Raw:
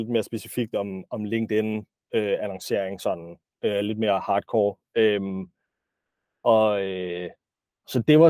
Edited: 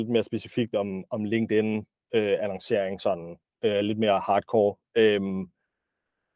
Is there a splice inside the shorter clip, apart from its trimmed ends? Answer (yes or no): no